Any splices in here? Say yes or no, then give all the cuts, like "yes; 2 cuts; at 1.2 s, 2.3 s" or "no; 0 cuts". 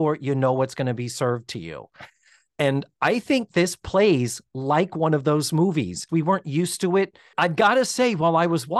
yes; 2 cuts; at 6.1 s, 7.3 s